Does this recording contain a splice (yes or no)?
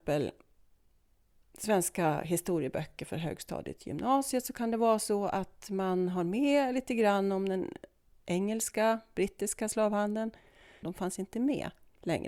yes